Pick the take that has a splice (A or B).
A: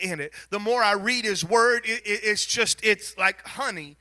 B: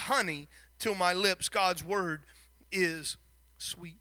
A